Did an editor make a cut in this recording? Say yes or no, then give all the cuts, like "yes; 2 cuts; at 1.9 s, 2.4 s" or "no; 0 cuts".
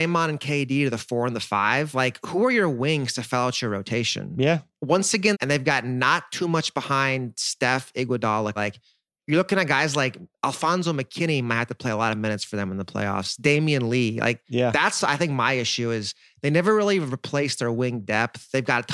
yes; 2 cuts; at 5.3 s, 8.6 s